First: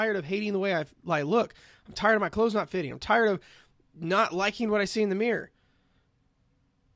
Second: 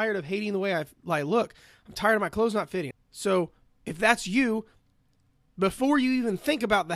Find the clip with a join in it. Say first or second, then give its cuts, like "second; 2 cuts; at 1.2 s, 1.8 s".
second; 1 cut; at 2.9 s